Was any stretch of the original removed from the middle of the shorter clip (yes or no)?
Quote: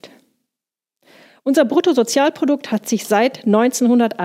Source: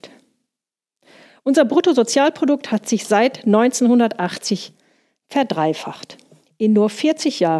no